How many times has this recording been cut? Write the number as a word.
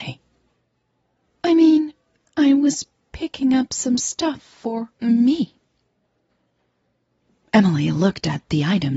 two